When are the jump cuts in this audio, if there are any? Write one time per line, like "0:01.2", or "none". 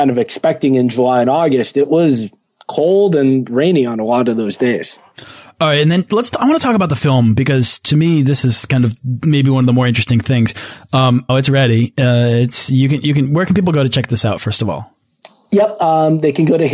0:11.3